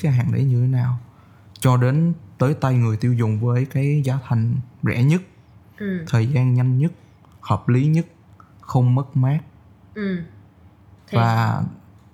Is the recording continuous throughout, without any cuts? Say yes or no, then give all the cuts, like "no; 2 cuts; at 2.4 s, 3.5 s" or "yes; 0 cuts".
yes; 0 cuts